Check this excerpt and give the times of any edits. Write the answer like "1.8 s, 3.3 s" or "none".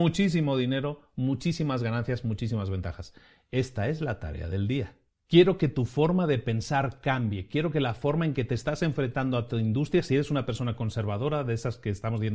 none